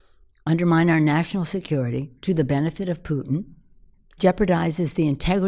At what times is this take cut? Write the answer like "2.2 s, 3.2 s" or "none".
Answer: none